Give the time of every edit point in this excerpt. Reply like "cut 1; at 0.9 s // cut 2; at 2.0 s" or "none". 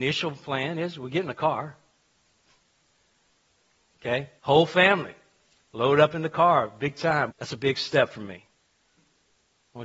cut 1; at 4.4 s // cut 2; at 7.3 s